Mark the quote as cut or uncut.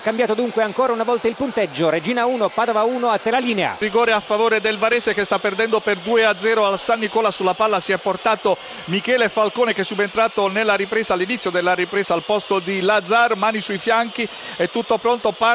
uncut